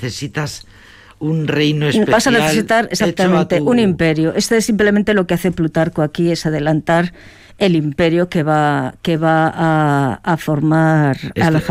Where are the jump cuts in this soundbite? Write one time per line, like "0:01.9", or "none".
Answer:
none